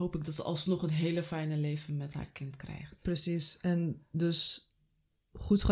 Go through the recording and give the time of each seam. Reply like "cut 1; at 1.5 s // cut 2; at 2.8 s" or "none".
none

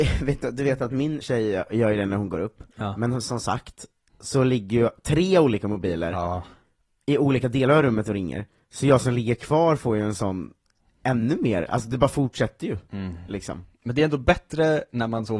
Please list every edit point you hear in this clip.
cut 1; at 1.2 s

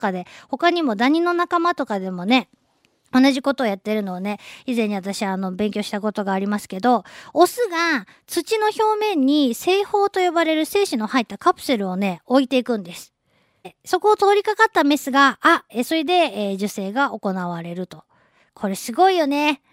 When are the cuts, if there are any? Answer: cut 1; at 13.6 s // cut 2; at 15.7 s

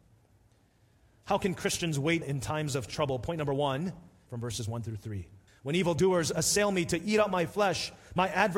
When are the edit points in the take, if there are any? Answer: cut 1; at 2.2 s // cut 2; at 4.3 s // cut 3; at 5.5 s

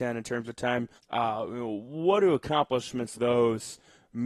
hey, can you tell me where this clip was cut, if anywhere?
cut 1; at 1.0 s // cut 2; at 3.1 s

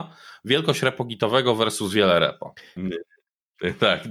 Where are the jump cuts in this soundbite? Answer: cut 1; at 2.8 s

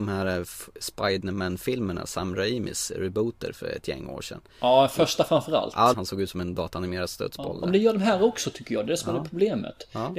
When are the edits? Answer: cut 1; at 5.9 s

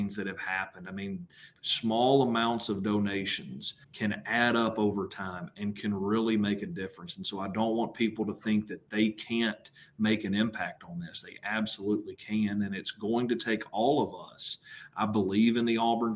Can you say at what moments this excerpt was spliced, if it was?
cut 1; at 1.6 s // cut 2; at 3.8 s

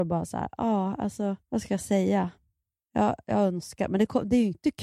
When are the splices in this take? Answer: cut 1; at 1.4 s

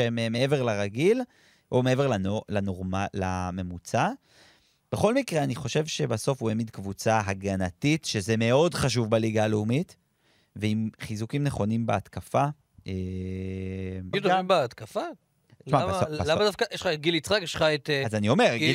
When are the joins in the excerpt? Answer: cut 1; at 14.1 s

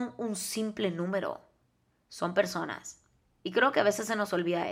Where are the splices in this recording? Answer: none

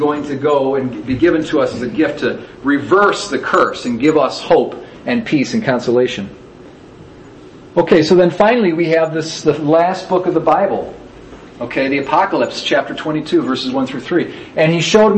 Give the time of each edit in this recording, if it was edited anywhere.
none

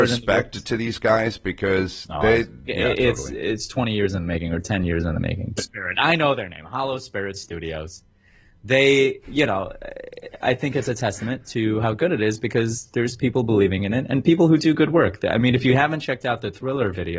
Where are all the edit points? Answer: cut 1; at 2.7 s // cut 2; at 5.6 s

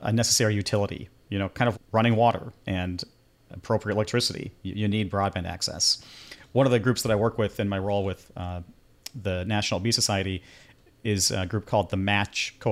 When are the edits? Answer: cut 1; at 1.7 s

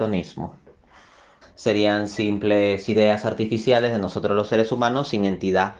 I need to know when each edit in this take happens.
cut 1; at 1.4 s

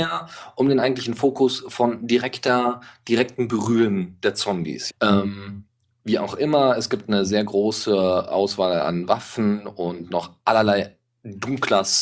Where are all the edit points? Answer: cut 1; at 4.9 s

